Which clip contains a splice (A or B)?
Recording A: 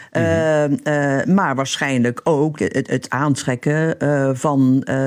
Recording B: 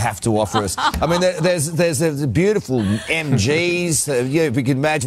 A